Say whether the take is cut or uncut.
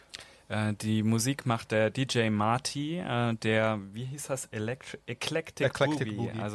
uncut